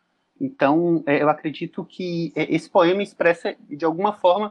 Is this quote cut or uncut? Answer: uncut